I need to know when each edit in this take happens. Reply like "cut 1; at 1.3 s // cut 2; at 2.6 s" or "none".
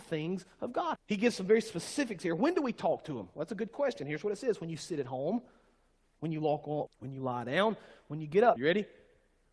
cut 1; at 1.0 s // cut 2; at 6.9 s // cut 3; at 8.6 s